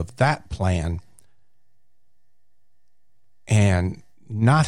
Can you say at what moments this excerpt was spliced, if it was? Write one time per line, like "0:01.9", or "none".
none